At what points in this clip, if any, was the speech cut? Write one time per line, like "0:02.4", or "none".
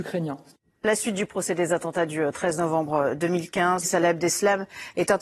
0:03.8